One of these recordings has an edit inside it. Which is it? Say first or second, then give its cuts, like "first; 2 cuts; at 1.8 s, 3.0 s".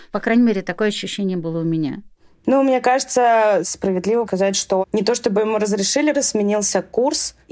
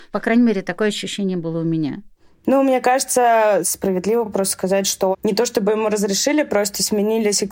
first; 2 cuts; at 4.3 s, 6.1 s